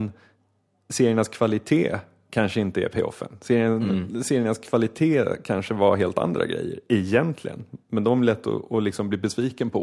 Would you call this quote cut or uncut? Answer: uncut